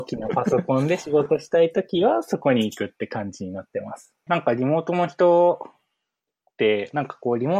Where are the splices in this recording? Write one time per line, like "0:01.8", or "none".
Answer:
0:04.3